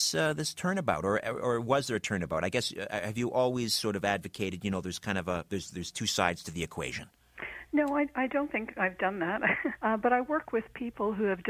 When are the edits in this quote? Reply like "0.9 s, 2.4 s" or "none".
9.8 s